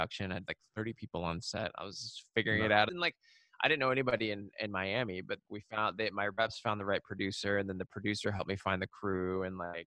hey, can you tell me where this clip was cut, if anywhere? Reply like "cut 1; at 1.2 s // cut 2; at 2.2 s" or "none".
cut 1; at 2.9 s // cut 2; at 5.5 s